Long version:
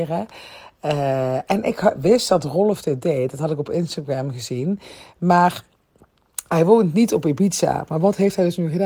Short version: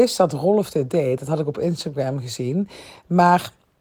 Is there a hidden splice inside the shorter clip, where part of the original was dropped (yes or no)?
no